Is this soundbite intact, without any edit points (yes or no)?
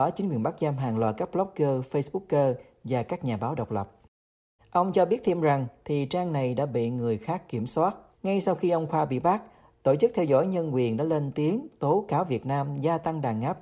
no